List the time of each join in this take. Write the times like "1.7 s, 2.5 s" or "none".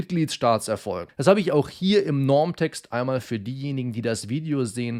1.1 s